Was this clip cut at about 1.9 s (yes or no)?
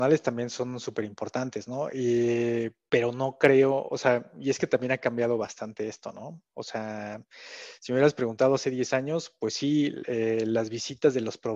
no